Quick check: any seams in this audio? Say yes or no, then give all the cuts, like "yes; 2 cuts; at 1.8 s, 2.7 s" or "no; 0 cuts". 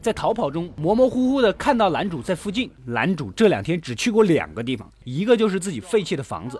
no; 0 cuts